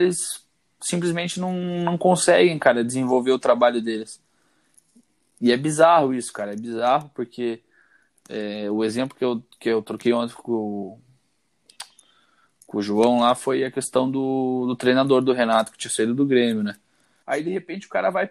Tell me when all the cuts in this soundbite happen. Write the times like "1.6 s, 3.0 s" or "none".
17.2 s

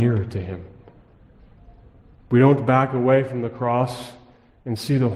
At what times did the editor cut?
none

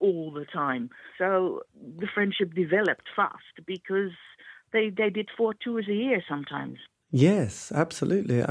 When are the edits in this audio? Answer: 1.1 s

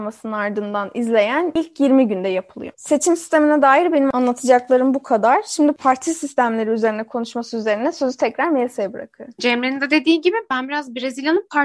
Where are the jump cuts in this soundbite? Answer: 9.4 s

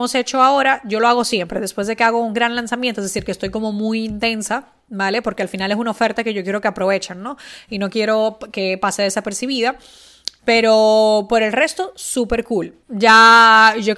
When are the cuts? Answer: 10.4 s, 12.8 s

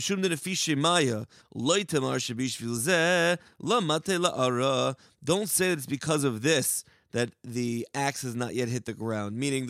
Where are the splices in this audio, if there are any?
1.4 s

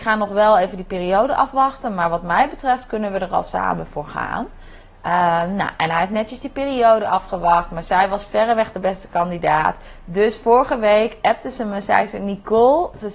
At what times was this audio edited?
none

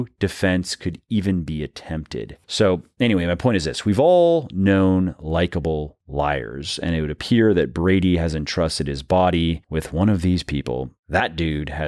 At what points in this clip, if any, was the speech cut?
none

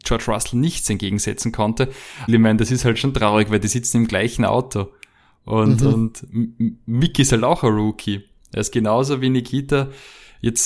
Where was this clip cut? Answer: 2.3 s

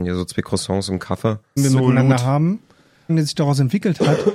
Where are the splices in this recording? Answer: 1.6 s, 3.1 s

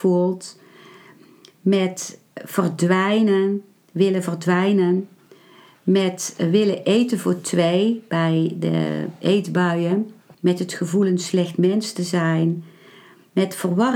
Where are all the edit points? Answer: 10.3 s

